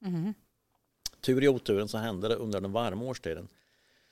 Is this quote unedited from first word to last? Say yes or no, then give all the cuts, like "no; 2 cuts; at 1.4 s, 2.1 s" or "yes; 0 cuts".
yes; 0 cuts